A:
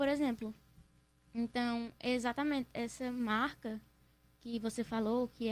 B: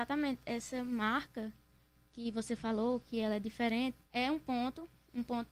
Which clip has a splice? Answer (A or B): B